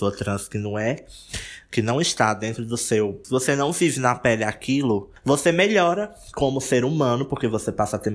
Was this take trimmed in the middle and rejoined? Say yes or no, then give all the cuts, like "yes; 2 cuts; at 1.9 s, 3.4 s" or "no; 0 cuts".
no; 0 cuts